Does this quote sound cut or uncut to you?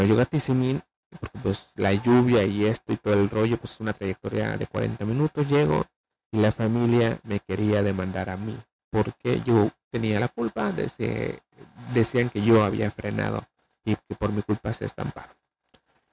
cut